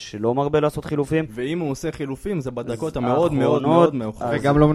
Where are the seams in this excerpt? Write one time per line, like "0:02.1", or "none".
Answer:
none